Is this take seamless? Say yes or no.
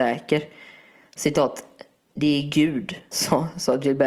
no